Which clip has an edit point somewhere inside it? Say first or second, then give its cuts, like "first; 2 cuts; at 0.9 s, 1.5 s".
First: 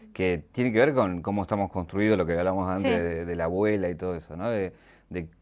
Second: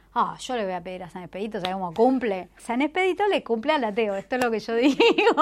second; 1 cut; at 2.6 s